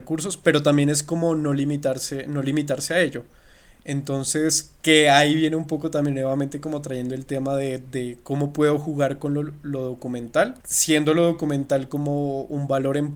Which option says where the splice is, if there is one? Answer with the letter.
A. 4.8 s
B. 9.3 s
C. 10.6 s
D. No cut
C